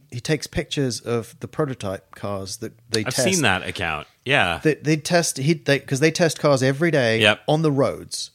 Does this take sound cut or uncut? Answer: uncut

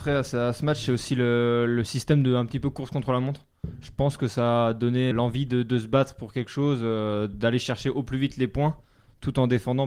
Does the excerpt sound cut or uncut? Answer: cut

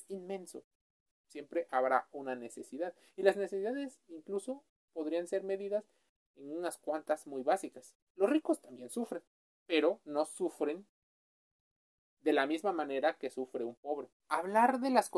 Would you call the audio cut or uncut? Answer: cut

